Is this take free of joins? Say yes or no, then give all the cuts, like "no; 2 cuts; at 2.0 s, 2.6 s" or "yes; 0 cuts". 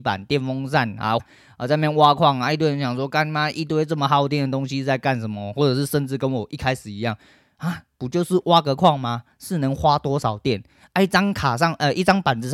no; 1 cut; at 1.2 s